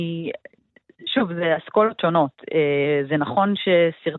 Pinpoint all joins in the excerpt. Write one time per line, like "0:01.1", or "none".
none